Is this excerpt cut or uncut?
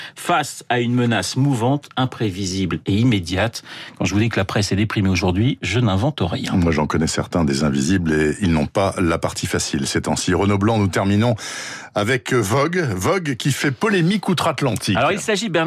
uncut